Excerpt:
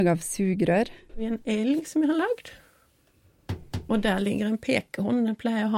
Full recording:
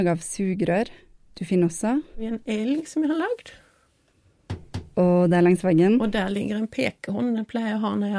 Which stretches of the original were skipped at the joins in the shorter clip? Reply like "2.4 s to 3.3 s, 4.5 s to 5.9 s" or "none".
1.1 s to 2.1 s, 4.9 s to 6.0 s